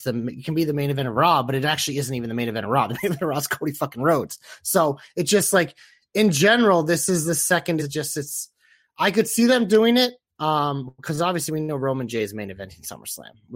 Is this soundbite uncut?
no; 1 cut; at 7.8 s

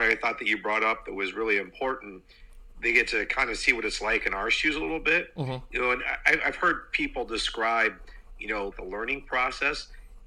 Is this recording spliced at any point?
yes; 1 cut; at 8.7 s

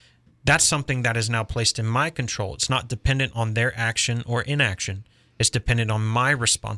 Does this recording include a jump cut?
no; 0 cuts

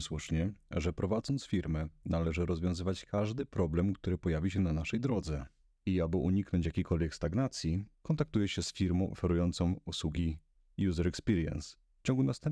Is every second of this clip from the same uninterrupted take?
yes; 0 cuts

